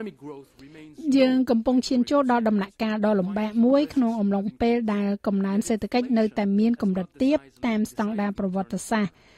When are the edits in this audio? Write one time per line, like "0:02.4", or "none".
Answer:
none